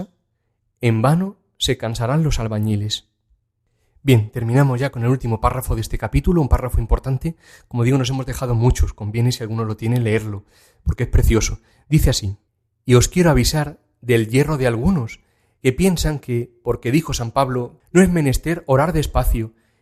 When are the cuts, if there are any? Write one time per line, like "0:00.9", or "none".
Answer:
0:11.7
0:17.8